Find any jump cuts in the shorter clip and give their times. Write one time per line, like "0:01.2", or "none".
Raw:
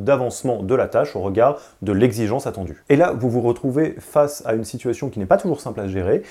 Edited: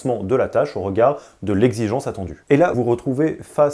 0:02.7